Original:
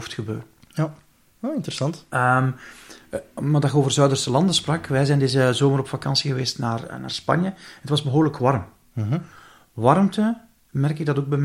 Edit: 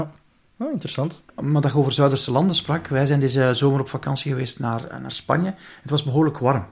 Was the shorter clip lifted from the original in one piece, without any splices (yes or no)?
no